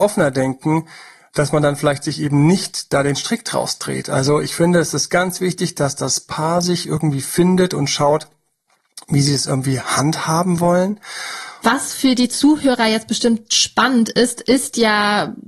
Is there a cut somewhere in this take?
yes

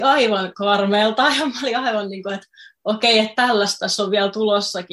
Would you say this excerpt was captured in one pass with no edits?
yes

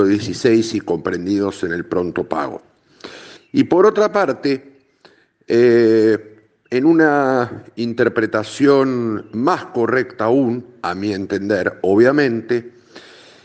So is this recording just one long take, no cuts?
no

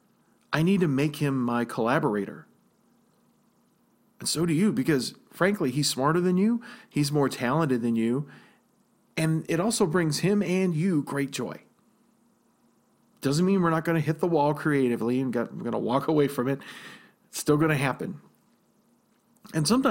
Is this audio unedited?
yes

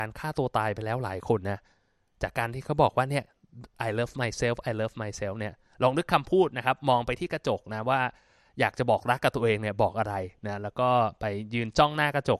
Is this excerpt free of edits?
yes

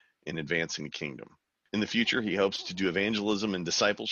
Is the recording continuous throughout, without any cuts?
no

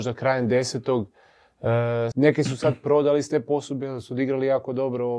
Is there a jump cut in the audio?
yes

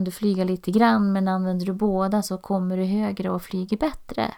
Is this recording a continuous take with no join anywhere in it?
yes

